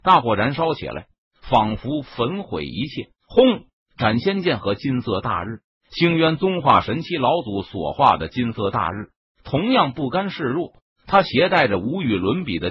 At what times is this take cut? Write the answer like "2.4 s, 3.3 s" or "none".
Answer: 3.1 s, 5.8 s